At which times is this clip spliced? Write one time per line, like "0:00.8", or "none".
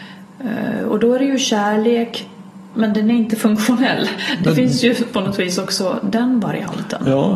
none